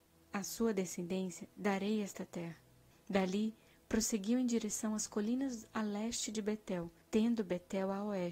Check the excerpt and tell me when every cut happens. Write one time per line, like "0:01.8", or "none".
0:02.9
0:07.0